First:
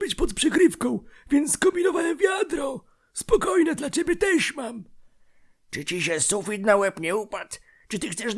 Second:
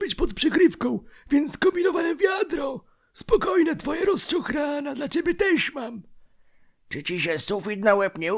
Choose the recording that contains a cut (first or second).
first